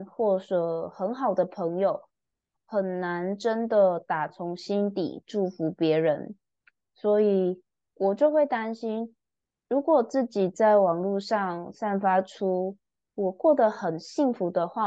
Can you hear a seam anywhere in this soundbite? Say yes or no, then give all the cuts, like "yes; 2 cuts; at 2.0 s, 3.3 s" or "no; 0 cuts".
no; 0 cuts